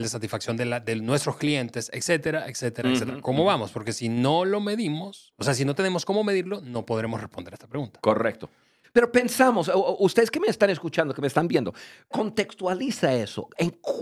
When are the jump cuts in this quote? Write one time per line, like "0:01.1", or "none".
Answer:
0:08.8
0:12.1